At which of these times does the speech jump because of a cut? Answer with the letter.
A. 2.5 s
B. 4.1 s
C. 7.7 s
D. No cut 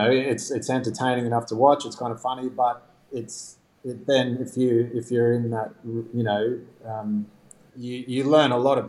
C